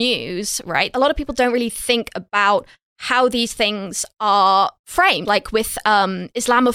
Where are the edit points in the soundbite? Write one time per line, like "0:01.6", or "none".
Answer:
0:00.9
0:05.2